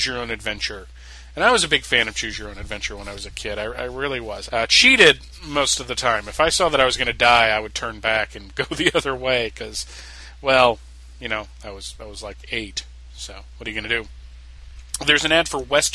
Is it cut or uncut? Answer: cut